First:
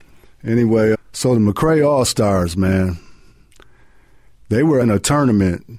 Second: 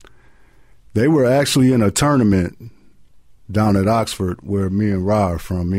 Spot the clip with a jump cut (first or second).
first